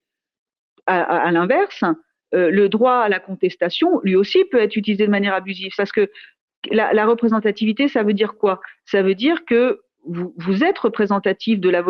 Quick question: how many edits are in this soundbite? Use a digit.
1